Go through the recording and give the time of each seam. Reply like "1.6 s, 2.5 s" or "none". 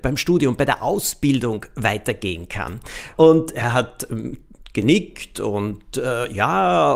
3.2 s

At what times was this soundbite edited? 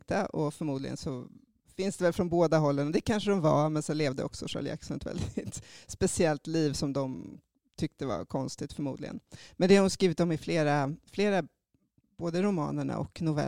none

